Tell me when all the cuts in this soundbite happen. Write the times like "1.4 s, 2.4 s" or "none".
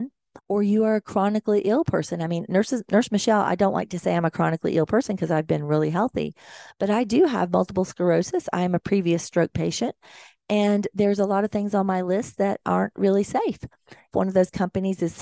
14.1 s